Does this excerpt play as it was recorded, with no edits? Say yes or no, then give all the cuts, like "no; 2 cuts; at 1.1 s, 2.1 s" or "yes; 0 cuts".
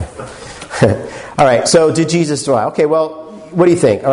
yes; 0 cuts